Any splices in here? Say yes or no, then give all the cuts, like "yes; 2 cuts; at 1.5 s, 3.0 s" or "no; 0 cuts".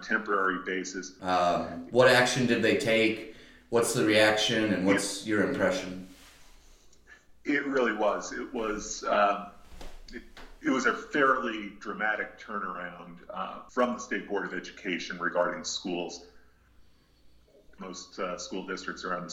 yes; 3 cuts; at 1.2 s, 13.7 s, 17.8 s